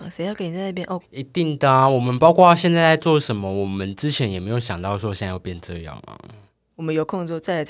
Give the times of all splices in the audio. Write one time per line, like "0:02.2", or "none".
0:01.0
0:06.7